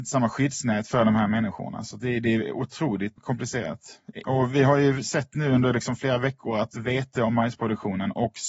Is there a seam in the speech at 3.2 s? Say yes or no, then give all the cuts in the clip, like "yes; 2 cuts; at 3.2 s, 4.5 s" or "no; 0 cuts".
yes; 3 cuts; at 3.2 s, 4.2 s, 6.7 s